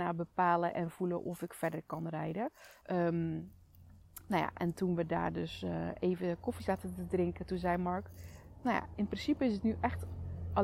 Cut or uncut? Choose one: cut